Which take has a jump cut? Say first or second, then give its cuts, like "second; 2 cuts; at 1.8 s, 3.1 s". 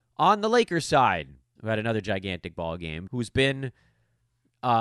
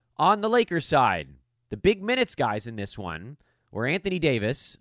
first; 2 cuts; at 1.6 s, 3.1 s